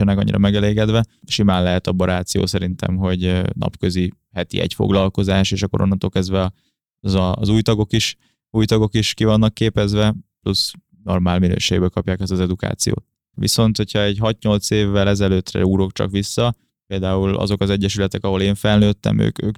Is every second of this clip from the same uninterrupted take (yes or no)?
no